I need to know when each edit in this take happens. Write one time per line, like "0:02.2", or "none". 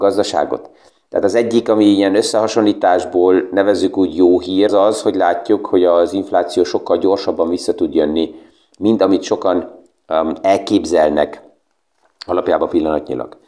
0:04.7